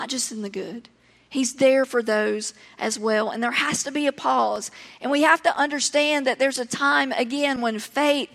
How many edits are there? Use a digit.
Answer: 0